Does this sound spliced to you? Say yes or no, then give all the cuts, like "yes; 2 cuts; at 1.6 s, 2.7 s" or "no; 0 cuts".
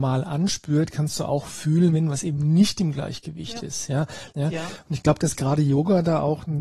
yes; 1 cut; at 4.3 s